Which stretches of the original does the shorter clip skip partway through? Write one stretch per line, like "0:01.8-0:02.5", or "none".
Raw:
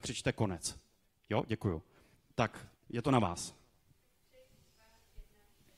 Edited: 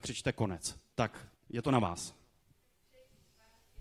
0:00.9-0:02.3